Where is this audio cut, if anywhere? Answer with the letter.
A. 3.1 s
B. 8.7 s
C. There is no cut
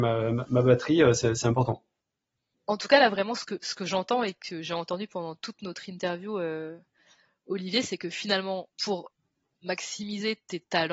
B